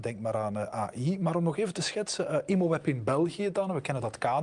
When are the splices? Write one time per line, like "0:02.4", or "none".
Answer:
none